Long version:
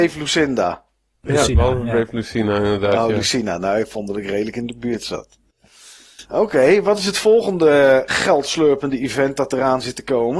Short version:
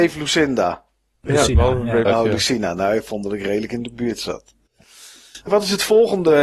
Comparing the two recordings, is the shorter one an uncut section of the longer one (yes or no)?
no